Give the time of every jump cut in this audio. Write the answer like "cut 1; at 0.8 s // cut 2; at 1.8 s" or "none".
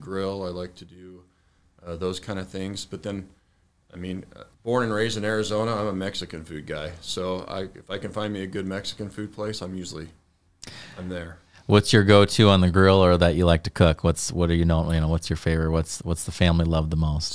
cut 1; at 4.5 s